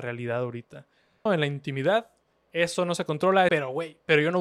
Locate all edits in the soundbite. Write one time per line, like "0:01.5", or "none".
0:01.3
0:03.5